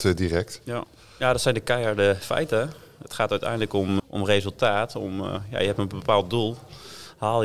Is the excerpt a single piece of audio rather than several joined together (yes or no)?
no